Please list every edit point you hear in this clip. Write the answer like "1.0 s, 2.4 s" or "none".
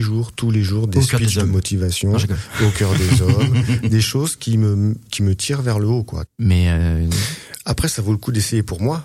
6.3 s